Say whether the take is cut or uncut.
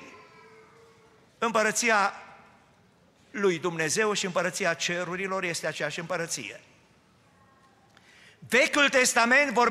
cut